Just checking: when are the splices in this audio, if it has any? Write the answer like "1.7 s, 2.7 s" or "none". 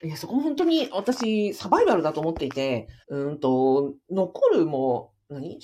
3.0 s